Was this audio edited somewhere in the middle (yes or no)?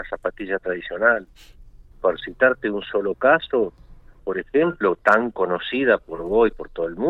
yes